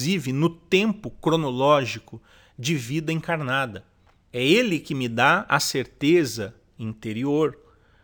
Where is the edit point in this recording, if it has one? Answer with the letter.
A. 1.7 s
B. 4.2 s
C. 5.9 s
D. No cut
B